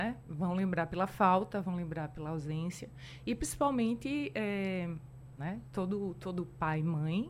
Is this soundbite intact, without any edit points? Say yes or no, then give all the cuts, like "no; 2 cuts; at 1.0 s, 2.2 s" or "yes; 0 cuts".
no; 1 cut; at 5.4 s